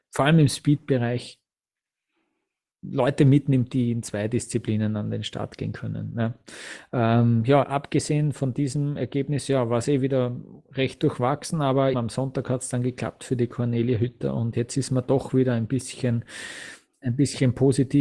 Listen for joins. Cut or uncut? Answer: cut